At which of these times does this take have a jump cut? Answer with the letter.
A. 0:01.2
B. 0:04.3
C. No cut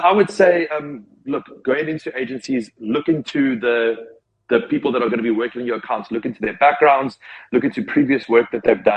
C